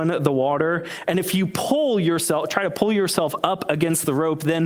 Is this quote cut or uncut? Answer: uncut